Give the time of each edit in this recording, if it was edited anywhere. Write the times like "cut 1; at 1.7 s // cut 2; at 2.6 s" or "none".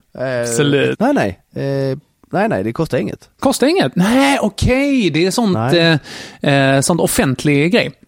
cut 1; at 0.9 s // cut 2; at 3.3 s